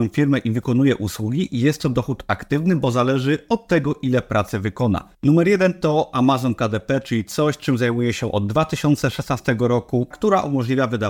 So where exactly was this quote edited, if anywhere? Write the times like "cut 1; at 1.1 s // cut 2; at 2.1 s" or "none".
cut 1; at 5.1 s // cut 2; at 10.1 s